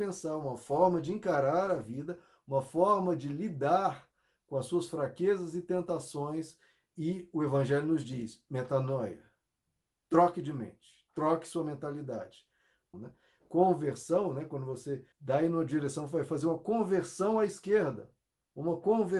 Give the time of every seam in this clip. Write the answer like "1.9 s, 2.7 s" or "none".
12.9 s, 15.1 s